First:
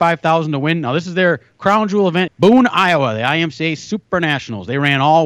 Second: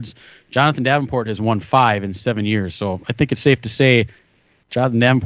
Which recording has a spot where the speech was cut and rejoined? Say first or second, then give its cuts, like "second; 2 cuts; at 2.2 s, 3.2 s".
first; 1 cut; at 2.3 s